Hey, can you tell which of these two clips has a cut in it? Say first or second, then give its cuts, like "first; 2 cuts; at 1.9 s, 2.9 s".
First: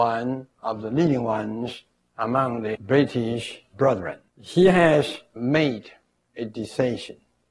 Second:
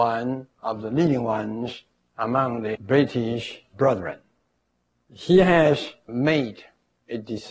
first; 1 cut; at 4.3 s